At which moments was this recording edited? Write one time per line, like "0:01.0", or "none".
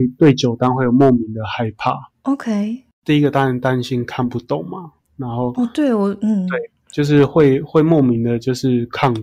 none